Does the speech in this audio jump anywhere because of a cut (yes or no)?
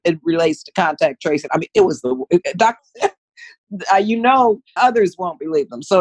yes